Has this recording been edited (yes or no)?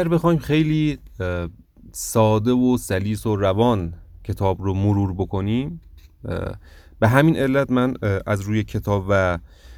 no